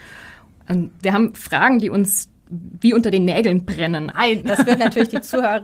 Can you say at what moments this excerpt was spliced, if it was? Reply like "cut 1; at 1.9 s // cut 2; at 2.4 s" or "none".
cut 1; at 4.1 s